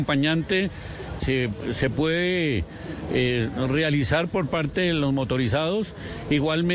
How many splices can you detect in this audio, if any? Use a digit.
1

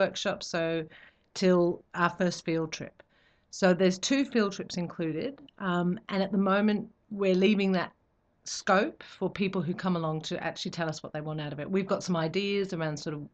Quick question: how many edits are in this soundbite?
0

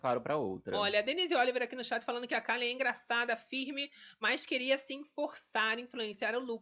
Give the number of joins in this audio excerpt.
0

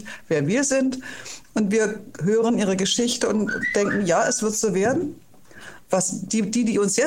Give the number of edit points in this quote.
1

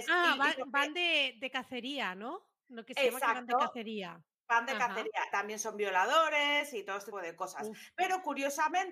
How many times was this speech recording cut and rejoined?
2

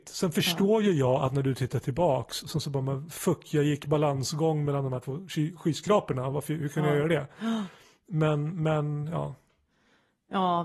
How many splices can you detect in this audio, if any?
0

